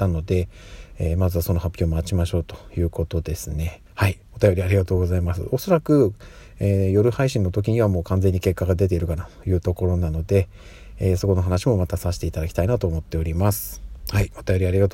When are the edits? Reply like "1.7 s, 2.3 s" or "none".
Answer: 3.9 s